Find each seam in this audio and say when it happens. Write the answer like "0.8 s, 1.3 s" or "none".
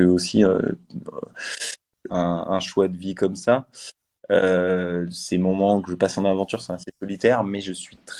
2.1 s

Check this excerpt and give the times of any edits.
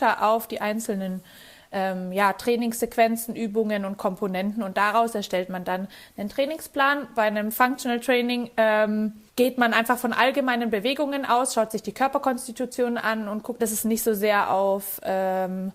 9.3 s, 13.6 s

